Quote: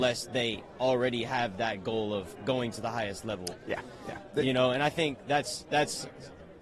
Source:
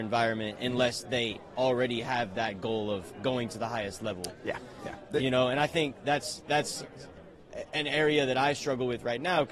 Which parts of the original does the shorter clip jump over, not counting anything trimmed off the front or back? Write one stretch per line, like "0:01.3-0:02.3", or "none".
none